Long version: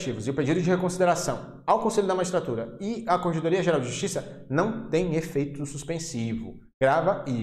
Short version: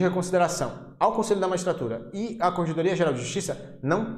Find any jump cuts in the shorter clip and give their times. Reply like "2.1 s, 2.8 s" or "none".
none

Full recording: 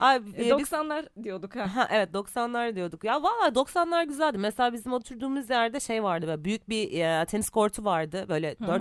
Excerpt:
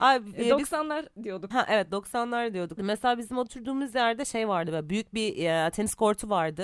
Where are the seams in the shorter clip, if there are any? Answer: 1.5 s, 2.8 s

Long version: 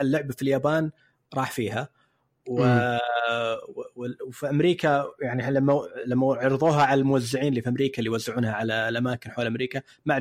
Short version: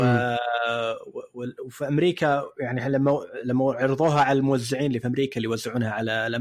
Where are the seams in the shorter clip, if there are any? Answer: none

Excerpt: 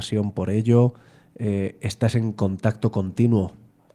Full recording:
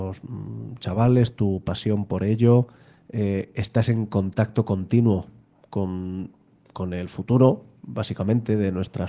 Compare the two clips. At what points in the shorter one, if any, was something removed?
none

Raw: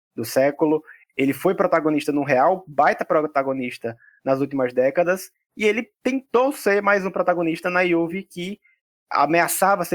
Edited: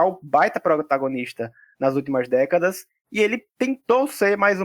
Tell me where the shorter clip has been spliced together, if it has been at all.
none

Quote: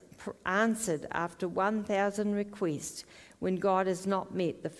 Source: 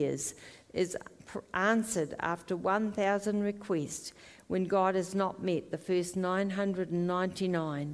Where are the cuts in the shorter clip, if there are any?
none

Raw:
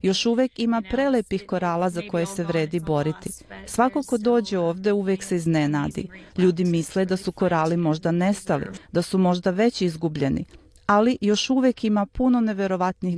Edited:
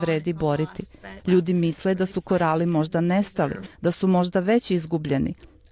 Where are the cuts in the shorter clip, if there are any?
1.2 s

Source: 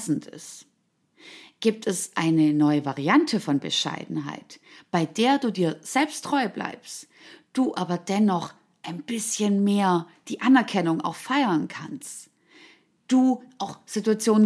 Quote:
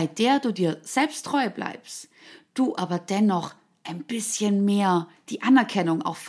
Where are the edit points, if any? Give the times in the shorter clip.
none

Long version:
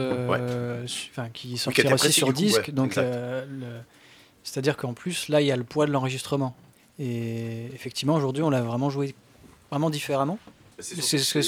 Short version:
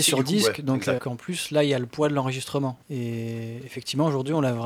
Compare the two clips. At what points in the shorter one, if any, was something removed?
1.0 s, 2.8 s

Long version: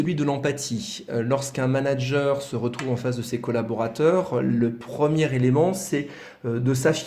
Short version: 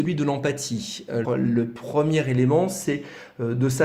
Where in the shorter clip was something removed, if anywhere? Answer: 1.2 s

